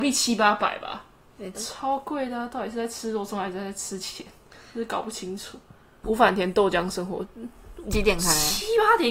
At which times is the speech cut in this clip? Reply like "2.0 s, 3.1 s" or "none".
1.5 s, 6.0 s